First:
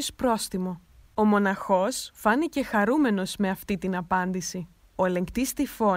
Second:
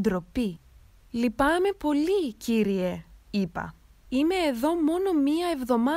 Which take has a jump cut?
first; 1 cut; at 1.1 s

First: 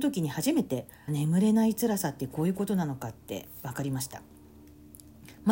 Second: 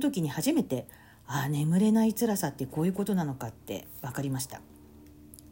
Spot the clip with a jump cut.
first; 1 cut; at 1.1 s

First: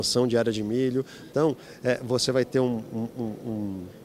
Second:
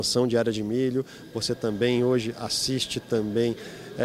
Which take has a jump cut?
first; 1 cut; at 1.3 s

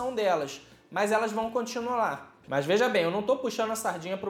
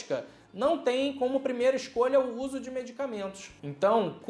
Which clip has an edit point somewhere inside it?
first; 1 cut; at 2.4 s

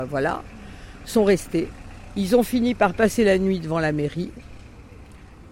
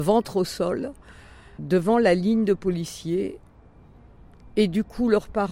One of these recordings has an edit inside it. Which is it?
second; 1 cut; at 1.6 s

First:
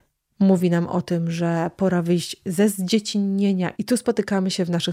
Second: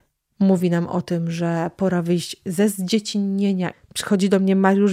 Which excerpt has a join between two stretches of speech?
second; 1 cut; at 3.7 s

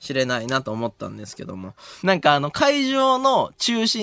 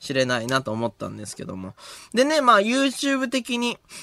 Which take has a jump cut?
first; 1 cut; at 2.0 s

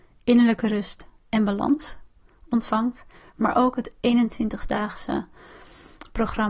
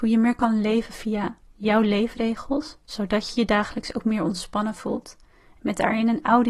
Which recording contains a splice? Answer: second; 1 cut; at 5.6 s

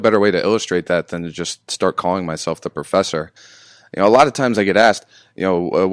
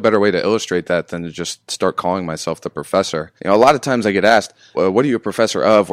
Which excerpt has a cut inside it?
second; 2 cuts; at 3.4 s, 4.7 s

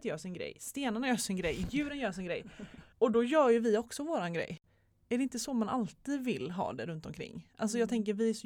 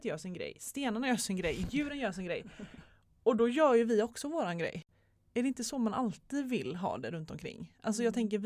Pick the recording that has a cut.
first; 1 cut; at 2.9 s

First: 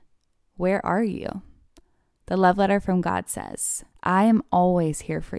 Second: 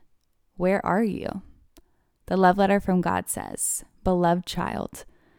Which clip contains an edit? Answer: first; 1 cut; at 3.9 s

